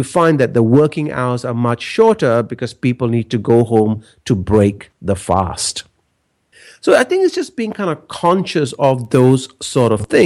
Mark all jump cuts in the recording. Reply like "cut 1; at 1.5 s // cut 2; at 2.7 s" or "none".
none